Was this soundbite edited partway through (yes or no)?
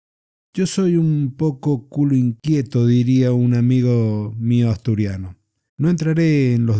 yes